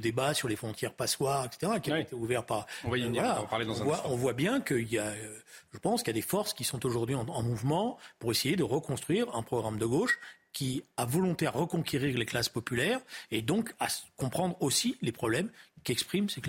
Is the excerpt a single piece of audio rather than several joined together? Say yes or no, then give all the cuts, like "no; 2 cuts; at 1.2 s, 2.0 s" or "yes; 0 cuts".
yes; 0 cuts